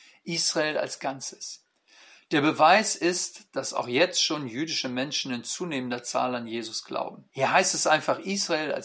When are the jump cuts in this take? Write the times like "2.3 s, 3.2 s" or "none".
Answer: 7.3 s